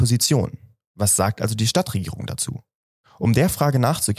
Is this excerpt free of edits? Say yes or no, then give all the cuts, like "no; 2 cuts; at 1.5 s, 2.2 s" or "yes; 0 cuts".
yes; 0 cuts